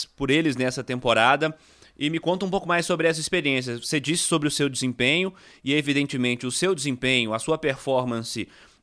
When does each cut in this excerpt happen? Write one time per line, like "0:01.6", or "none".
none